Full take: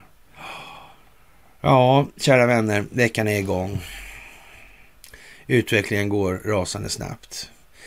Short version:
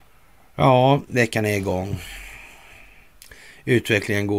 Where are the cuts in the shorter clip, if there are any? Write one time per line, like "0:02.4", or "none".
0:01.1